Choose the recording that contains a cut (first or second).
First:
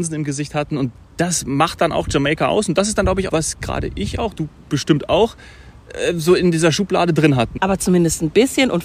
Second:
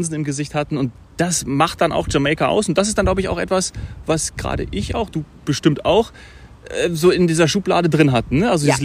first